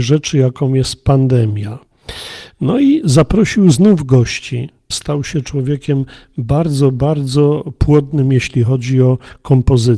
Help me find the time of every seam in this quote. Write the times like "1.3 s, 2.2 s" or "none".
4.9 s